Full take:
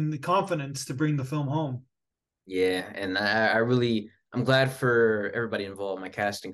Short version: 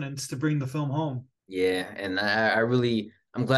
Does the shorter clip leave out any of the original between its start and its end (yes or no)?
yes